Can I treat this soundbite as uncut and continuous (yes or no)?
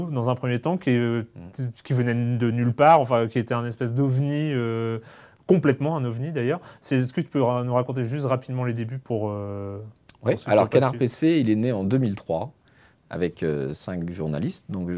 yes